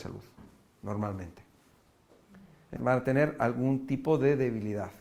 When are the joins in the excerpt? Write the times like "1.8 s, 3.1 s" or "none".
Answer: 2.8 s